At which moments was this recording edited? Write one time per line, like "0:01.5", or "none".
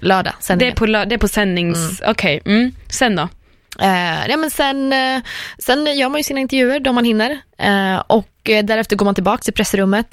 none